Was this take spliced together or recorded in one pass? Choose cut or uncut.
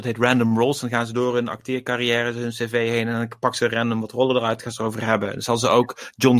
uncut